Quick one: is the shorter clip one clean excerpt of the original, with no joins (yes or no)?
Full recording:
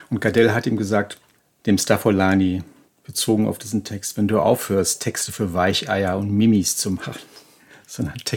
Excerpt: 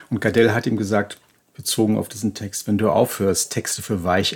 no